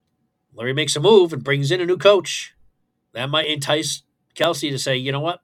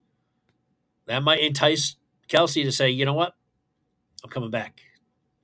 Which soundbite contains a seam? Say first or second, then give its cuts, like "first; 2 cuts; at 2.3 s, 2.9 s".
first; 1 cut; at 3.0 s